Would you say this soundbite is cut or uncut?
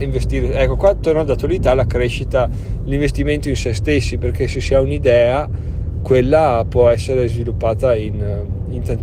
uncut